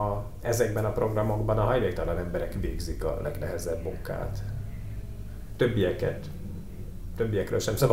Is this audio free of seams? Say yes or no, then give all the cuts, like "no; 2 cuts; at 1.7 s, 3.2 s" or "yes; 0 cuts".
yes; 0 cuts